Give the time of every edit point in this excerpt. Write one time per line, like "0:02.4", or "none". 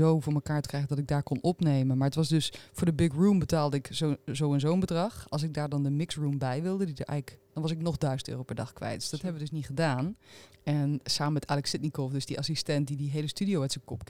0:07.5
0:10.5